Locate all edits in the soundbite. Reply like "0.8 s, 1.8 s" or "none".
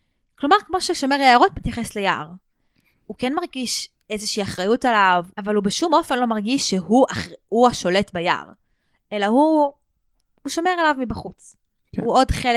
5.3 s